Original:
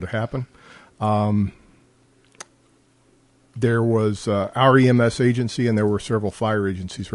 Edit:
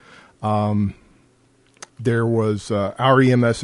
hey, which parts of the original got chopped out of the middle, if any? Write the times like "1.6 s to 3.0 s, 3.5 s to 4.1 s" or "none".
2.5 s to 3.5 s